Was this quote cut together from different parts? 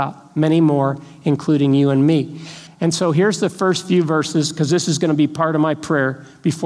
yes; 1 cut; at 2.7 s

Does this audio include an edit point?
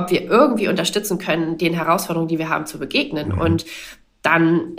no; 0 cuts

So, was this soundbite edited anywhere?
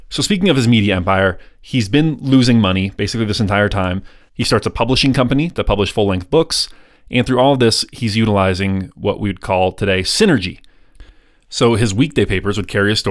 yes; 1 cut; at 4.2 s

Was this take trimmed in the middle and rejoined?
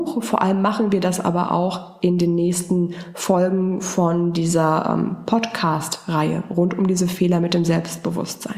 no; 0 cuts

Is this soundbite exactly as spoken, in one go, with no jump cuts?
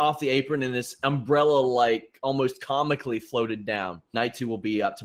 no; 1 cut; at 4.1 s

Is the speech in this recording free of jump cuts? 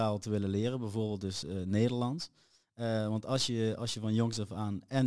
yes; 0 cuts

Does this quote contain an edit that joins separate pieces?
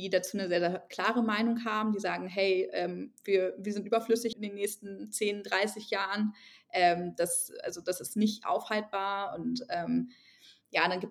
yes; 1 cut; at 4.3 s

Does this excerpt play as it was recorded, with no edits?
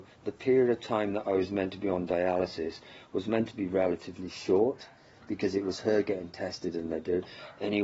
yes; 0 cuts

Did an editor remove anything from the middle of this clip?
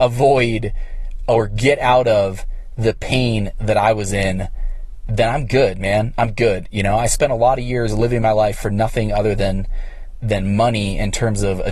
no; 0 cuts

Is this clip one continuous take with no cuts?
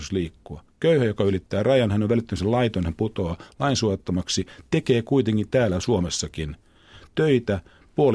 yes; 0 cuts

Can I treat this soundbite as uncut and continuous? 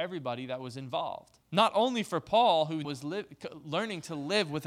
no; 2 cuts; at 1.4 s, 2.8 s

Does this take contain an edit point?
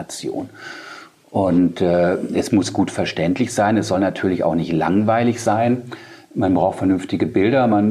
no; 0 cuts

